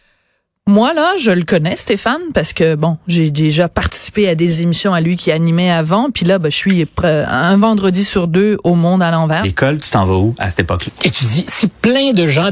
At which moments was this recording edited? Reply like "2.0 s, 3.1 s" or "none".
9.4 s, 10.9 s